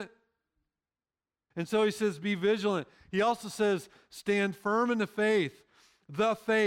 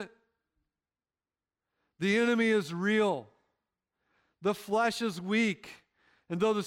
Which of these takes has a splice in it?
first; 1 cut; at 1.5 s

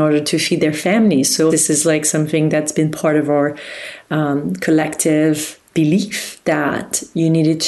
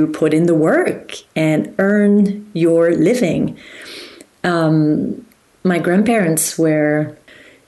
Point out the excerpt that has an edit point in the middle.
first; 2 cuts; at 1.5 s, 5.7 s

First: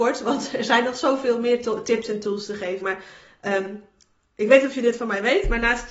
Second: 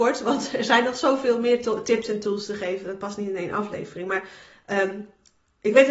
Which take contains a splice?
first; 1 cut; at 2.8 s

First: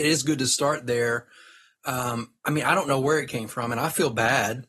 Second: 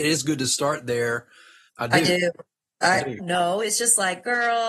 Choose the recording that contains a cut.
second; 2 cuts; at 1.7 s, 3.2 s

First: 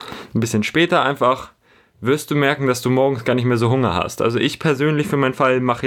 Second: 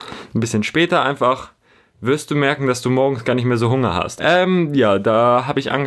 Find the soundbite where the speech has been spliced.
second; 1 cut; at 4.2 s

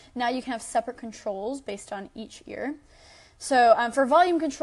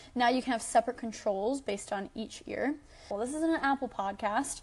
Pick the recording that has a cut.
second; 1 cut; at 3.1 s

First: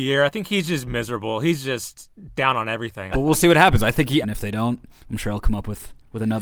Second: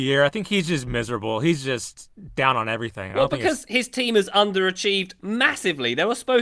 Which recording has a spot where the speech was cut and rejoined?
first; 2 cuts; at 3.1 s, 4.2 s

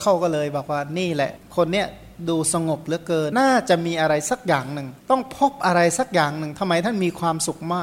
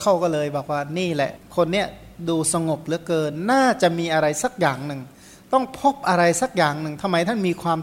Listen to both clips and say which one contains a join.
first; 2 cuts; at 3.3 s, 5.0 s

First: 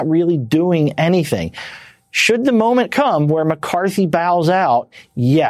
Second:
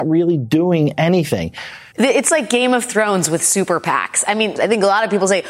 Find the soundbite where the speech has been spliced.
second; 2 cuts; at 1.9 s, 4.6 s

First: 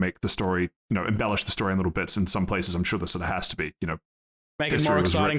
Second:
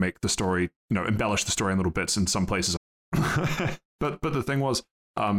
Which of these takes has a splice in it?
second; 2 cuts; at 2.8 s, 3.9 s

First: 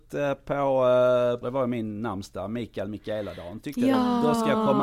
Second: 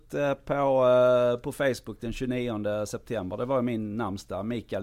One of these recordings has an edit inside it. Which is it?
first; 1 cut; at 1.4 s

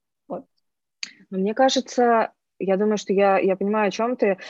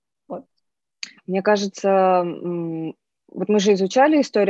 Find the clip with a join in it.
second; 1 cut; at 1.2 s

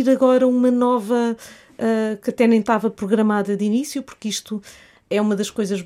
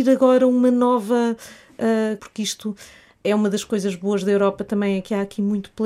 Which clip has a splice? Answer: second; 1 cut; at 2.2 s

